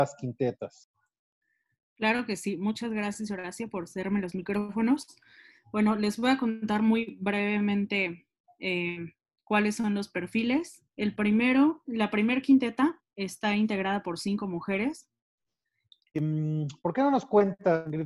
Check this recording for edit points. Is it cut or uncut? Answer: cut